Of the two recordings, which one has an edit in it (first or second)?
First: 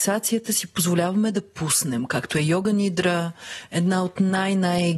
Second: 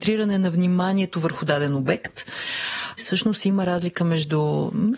second